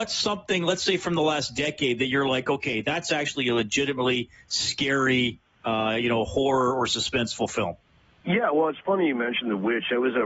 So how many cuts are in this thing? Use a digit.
0